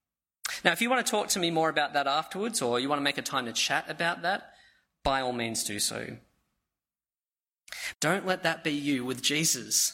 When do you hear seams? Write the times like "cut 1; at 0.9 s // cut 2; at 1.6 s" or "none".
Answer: cut 1; at 7.9 s

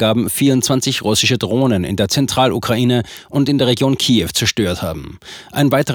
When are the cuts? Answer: none

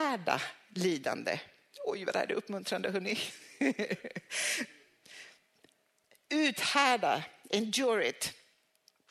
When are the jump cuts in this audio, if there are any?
none

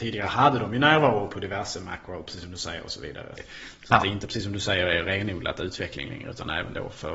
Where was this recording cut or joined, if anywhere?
cut 1; at 3.4 s

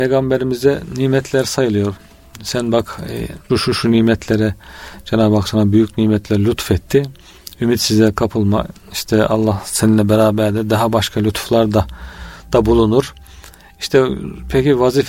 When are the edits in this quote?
cut 1; at 3.5 s

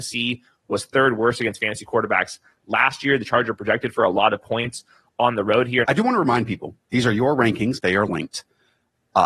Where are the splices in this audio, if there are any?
cut 1; at 5.8 s // cut 2; at 7.8 s

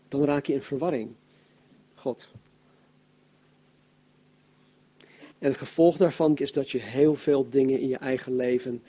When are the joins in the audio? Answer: cut 1; at 1.9 s // cut 2; at 5.3 s // cut 3; at 6.4 s

